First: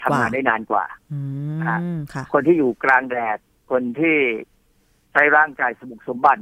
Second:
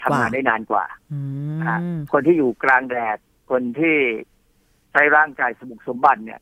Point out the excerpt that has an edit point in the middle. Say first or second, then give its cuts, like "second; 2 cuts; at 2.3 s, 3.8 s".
second; 1 cut; at 2.1 s